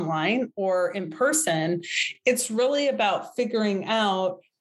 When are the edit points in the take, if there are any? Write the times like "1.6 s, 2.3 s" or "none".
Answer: none